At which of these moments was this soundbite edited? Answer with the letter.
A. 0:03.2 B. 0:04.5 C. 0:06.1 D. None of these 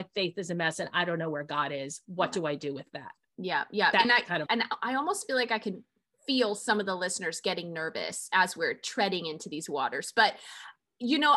B